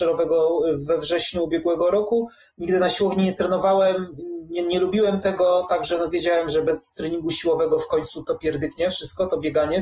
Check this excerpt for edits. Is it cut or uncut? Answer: cut